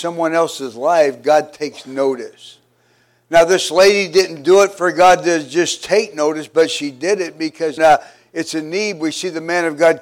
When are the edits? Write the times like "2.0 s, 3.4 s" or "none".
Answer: 7.8 s